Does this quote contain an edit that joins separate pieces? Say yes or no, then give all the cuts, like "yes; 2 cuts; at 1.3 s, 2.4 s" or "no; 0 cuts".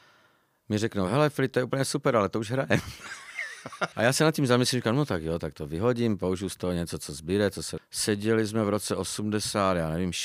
yes; 2 cuts; at 3.9 s, 7.8 s